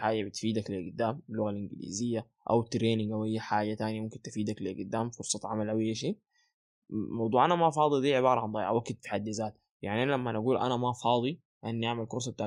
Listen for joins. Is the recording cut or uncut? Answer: uncut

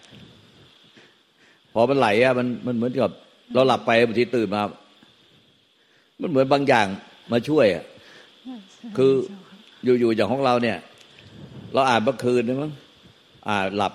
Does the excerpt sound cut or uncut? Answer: uncut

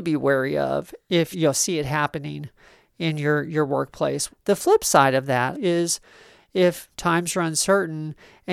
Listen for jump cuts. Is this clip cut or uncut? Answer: cut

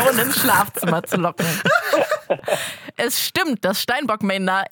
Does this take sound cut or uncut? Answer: uncut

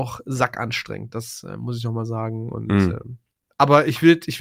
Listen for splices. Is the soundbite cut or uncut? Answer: uncut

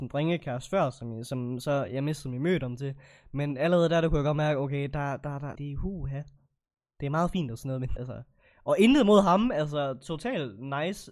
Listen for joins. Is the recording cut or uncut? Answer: cut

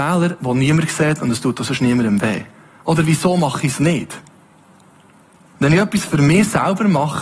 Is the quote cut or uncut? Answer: cut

